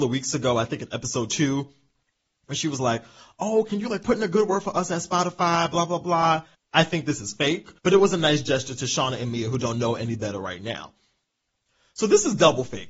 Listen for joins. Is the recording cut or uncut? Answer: cut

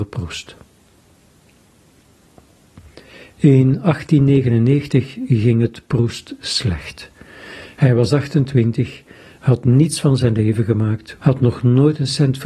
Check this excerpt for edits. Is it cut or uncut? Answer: cut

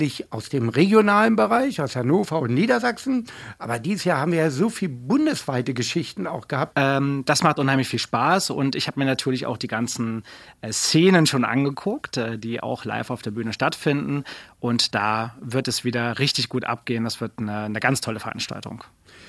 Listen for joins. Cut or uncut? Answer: cut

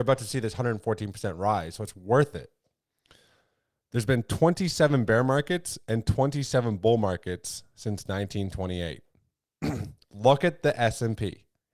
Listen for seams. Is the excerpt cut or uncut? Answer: uncut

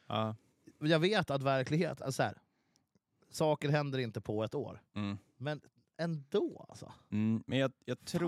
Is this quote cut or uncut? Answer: uncut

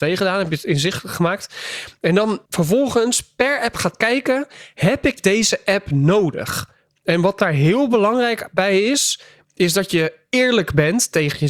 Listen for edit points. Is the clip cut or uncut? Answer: cut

